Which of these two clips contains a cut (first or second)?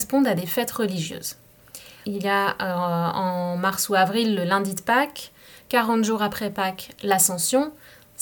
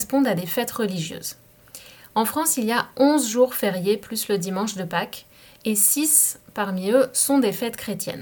first